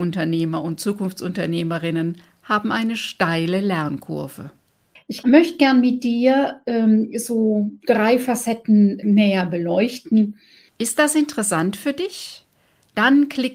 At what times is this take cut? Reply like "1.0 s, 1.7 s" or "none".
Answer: 5.0 s, 10.7 s